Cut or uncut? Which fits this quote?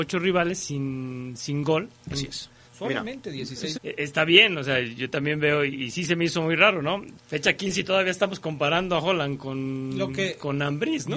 cut